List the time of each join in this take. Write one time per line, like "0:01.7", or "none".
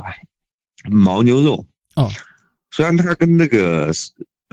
none